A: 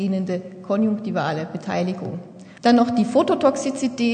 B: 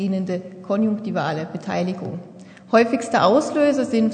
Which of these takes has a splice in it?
A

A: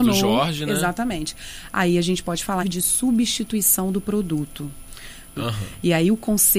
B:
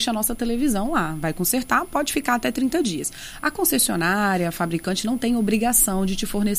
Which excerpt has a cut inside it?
A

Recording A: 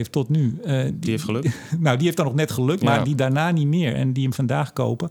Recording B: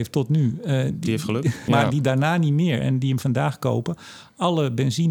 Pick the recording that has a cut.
B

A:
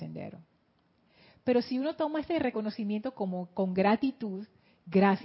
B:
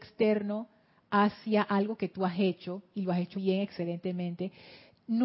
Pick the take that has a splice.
B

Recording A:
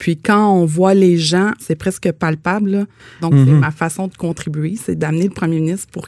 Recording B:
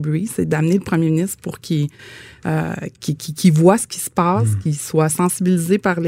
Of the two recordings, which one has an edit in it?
A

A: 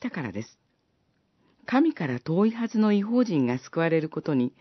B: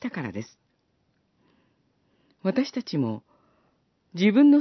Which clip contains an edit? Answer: A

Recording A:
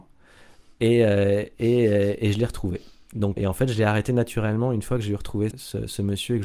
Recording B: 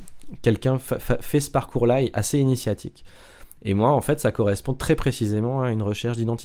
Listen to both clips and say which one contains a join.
A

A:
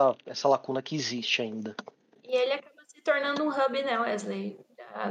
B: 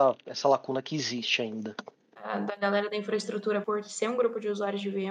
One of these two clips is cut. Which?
B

